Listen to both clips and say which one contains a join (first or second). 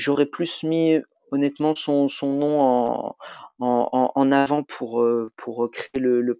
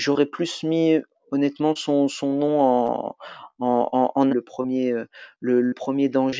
second